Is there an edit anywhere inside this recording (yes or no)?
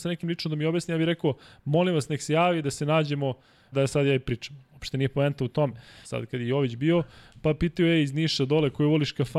yes